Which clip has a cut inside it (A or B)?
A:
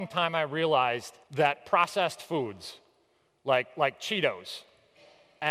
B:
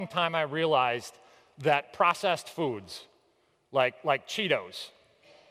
A